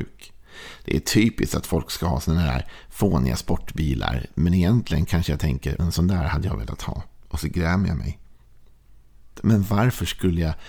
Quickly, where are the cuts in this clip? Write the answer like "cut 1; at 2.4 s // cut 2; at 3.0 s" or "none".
cut 1; at 5.8 s // cut 2; at 9.3 s